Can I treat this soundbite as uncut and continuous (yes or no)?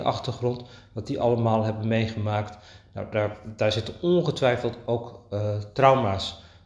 yes